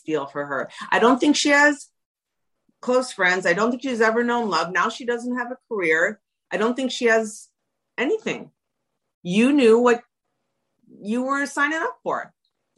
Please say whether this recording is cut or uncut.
cut